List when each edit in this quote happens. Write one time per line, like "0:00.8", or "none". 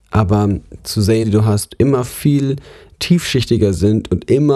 0:01.2